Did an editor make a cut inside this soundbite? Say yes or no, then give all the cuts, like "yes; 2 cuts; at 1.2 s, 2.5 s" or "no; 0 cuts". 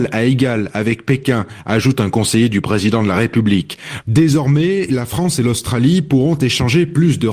yes; 1 cut; at 4.0 s